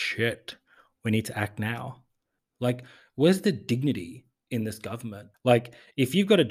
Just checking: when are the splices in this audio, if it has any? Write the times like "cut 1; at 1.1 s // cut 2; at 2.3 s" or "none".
cut 1; at 2.4 s // cut 2; at 5.3 s